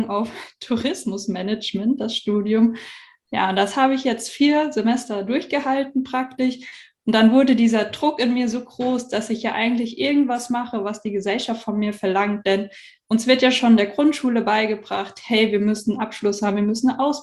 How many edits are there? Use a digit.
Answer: 0